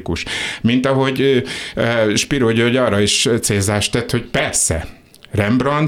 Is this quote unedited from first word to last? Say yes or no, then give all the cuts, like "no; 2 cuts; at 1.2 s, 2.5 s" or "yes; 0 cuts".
yes; 0 cuts